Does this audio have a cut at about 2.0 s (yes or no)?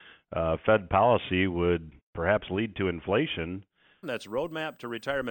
yes